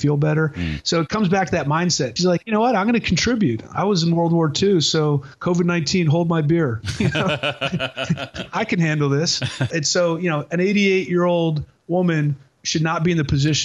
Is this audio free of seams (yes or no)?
no